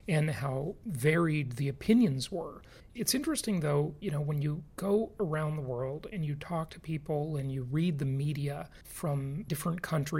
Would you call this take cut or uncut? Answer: cut